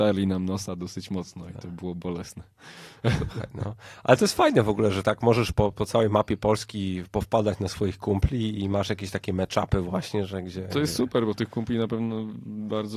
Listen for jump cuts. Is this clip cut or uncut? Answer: uncut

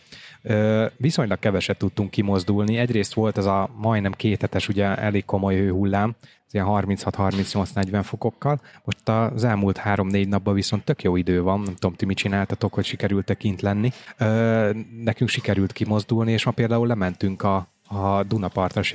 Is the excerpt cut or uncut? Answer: uncut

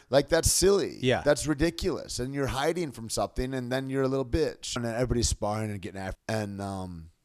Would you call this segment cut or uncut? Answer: cut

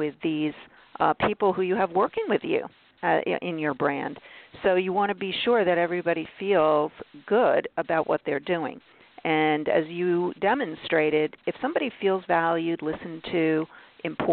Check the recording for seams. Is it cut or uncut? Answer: uncut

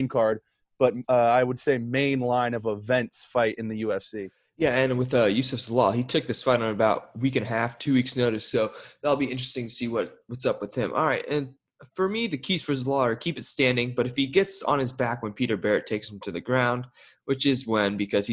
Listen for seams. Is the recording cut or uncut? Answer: uncut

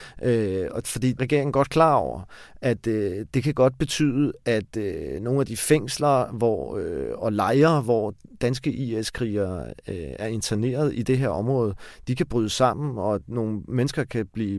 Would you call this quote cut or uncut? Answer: cut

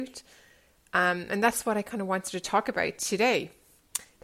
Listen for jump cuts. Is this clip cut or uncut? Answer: uncut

